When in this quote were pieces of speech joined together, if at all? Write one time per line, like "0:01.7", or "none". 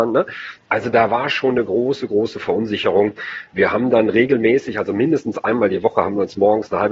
none